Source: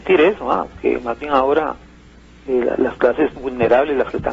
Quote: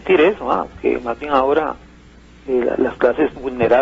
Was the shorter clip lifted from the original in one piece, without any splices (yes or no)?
yes